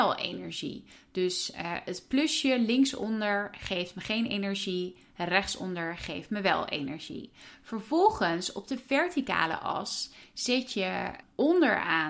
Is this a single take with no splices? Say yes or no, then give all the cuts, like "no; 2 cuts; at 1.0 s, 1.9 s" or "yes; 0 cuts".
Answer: yes; 0 cuts